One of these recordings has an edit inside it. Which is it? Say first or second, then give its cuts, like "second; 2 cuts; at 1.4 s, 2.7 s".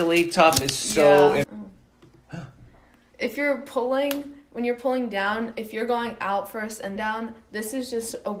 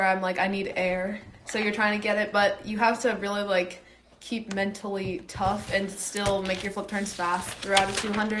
first; 3 cuts; at 1.4 s, 3.1 s, 7.0 s